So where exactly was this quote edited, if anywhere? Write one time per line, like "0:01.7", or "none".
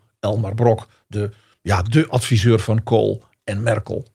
none